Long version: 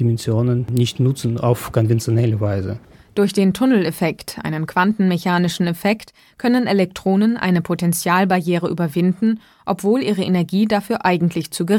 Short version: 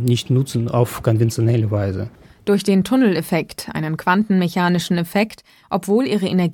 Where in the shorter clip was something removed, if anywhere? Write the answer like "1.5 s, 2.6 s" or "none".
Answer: 5.6 s